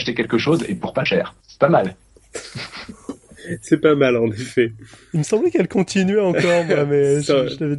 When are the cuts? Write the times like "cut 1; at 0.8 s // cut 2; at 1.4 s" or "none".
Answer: cut 1; at 1.4 s